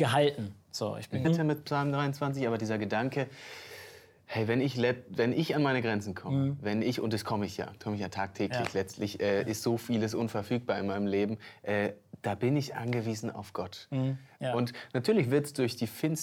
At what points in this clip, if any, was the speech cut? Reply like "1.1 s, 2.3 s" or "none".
1.2 s, 14.4 s